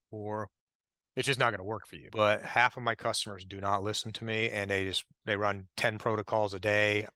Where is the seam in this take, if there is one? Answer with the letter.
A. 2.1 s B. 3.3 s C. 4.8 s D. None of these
A